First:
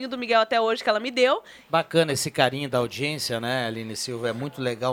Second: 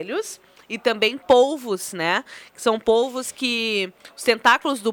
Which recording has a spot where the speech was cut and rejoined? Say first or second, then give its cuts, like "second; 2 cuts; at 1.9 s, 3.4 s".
first; 1 cut; at 1.7 s